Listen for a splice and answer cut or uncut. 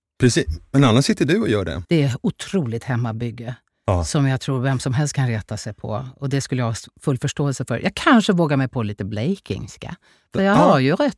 cut